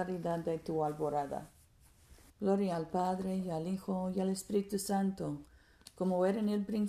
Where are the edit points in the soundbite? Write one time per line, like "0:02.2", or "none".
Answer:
0:02.3